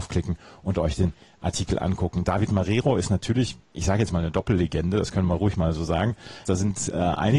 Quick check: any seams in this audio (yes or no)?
yes